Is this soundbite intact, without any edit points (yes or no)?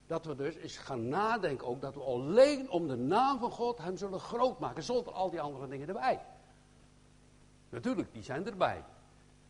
yes